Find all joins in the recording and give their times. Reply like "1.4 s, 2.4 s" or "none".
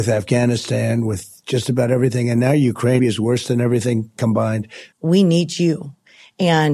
3.0 s, 4.9 s